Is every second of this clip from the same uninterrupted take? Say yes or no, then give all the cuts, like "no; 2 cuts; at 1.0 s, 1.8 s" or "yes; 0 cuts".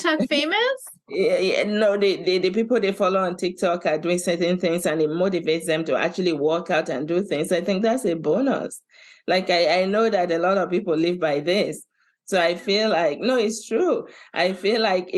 yes; 0 cuts